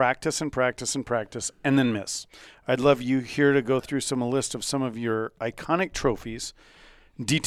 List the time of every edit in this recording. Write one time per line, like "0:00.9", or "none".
none